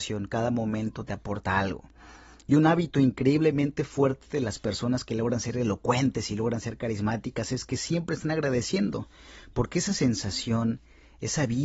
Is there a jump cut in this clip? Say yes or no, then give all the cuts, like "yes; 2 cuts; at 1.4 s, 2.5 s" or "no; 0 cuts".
no; 0 cuts